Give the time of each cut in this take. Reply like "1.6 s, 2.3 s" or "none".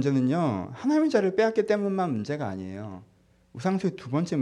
none